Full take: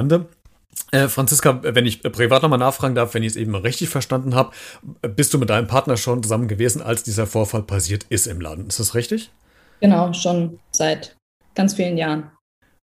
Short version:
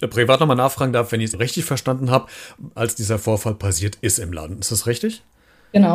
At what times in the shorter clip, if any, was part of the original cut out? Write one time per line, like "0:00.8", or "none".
0:01.3
0:02.8